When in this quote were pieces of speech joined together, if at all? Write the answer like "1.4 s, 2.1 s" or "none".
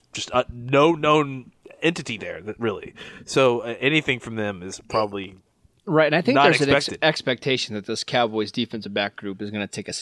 none